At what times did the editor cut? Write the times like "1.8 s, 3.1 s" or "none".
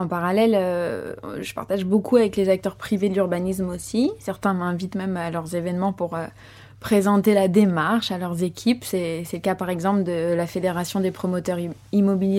none